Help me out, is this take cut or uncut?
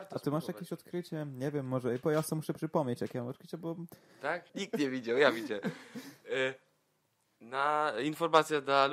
cut